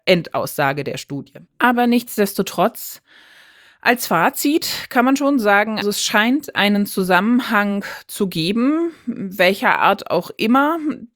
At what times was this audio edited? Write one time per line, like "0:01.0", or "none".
0:01.5
0:05.8